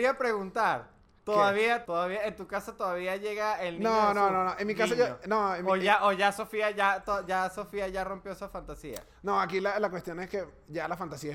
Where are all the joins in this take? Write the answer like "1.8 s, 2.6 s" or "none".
1.8 s